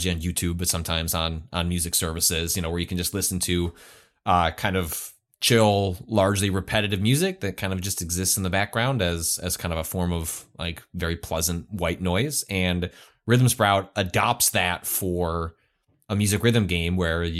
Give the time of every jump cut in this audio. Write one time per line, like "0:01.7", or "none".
none